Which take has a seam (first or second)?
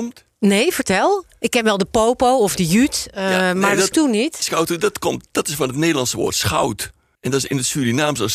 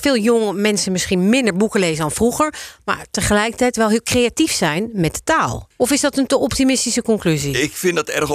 first